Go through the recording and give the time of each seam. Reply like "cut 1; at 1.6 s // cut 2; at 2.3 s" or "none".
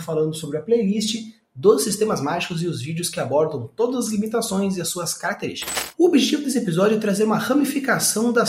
none

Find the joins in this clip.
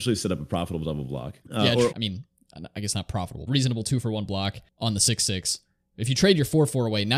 cut 1; at 1.9 s // cut 2; at 3.5 s

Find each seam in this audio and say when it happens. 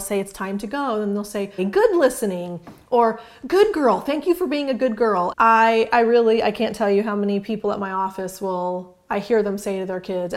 cut 1; at 1.6 s // cut 2; at 5.3 s

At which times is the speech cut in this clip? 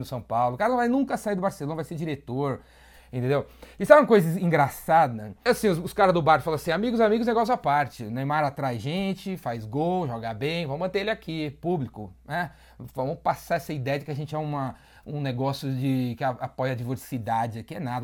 cut 1; at 5.5 s

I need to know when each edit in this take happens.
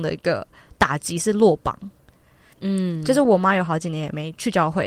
cut 1; at 2.5 s

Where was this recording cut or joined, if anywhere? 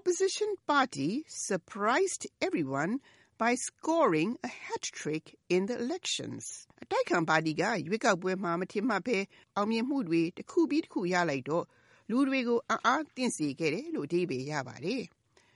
cut 1; at 6.7 s

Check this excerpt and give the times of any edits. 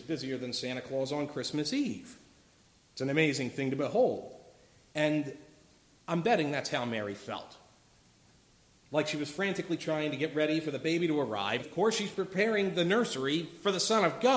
cut 1; at 11.6 s

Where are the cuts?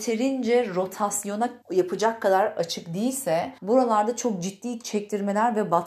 cut 1; at 1.6 s // cut 2; at 3.6 s

